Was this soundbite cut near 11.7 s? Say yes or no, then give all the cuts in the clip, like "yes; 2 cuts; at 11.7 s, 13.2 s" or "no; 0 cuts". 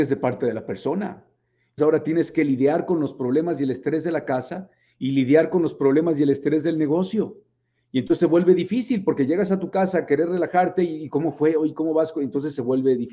no; 1 cut; at 1.8 s